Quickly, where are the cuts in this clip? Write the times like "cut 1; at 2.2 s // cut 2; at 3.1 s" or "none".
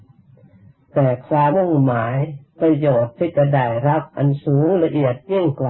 cut 1; at 1.5 s

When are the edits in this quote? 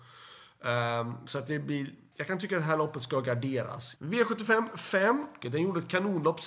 cut 1; at 2.1 s // cut 2; at 4.0 s // cut 3; at 5.4 s

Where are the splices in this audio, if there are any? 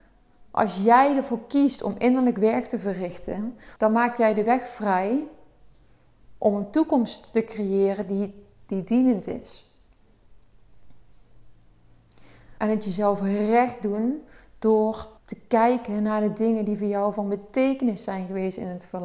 cut 1; at 3.8 s // cut 2; at 12.6 s // cut 3; at 15.2 s

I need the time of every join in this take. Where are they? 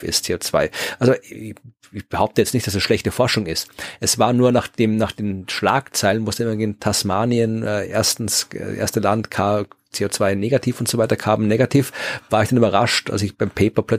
none

